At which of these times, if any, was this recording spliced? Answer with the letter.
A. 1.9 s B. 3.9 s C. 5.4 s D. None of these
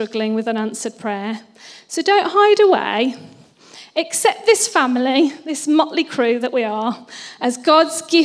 D